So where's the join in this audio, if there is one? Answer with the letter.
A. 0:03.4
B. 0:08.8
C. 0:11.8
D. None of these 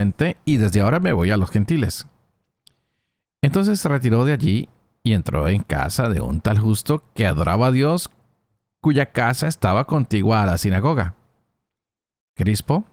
D